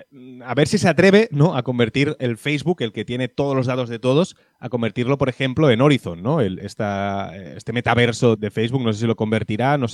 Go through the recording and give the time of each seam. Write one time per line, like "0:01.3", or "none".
0:06.6
0:08.4